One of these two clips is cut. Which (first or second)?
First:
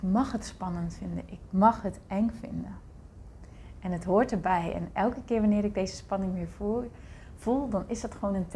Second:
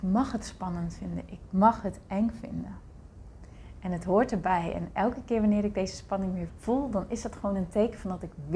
second